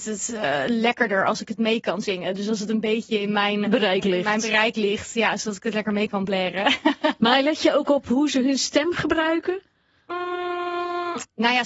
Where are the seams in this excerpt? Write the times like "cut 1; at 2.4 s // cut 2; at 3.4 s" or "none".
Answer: cut 1; at 3.6 s

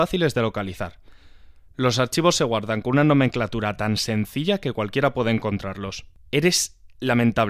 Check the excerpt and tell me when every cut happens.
cut 1; at 6.2 s

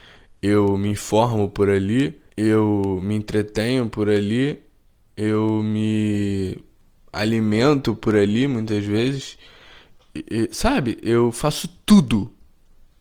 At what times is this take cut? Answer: cut 1; at 2.3 s

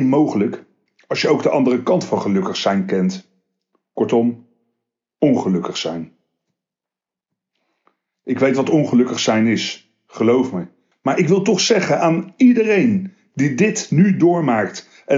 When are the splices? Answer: cut 1; at 10.9 s

